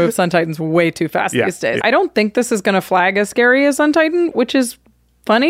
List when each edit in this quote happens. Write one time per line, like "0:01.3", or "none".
0:01.8